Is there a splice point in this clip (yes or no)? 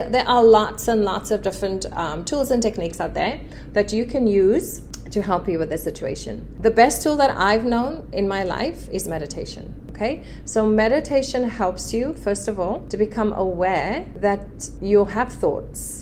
no